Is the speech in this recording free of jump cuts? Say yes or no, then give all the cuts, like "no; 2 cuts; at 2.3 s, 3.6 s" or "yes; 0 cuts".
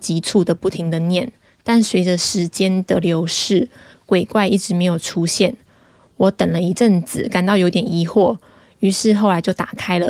yes; 0 cuts